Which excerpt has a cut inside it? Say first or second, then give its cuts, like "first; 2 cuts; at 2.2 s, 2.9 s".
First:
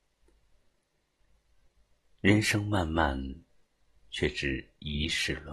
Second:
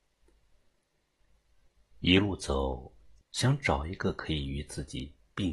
second; 2 cuts; at 1.9 s, 3.2 s